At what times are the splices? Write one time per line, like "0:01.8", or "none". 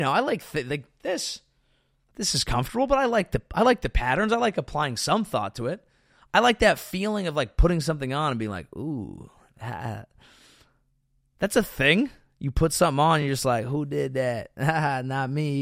none